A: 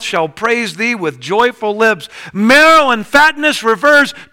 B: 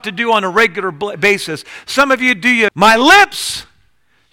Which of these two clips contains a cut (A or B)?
B